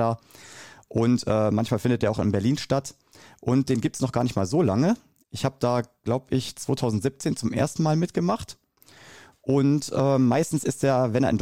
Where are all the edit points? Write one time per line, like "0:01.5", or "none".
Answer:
none